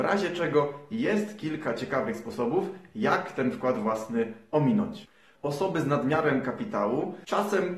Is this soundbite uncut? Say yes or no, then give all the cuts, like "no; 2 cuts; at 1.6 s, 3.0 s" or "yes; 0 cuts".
no; 1 cut; at 5.4 s